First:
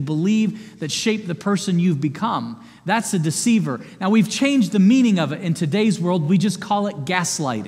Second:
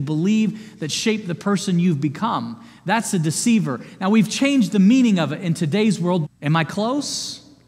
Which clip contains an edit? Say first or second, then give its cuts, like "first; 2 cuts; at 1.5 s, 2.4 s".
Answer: second; 1 cut; at 6.2 s